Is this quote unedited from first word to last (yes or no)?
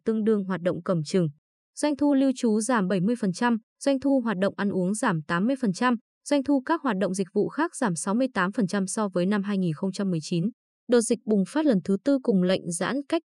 yes